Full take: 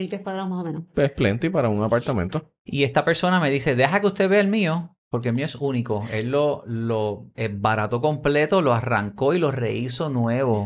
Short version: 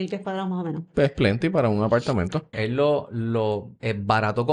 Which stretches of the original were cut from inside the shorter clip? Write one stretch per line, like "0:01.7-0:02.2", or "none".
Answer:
0:02.5-0:06.1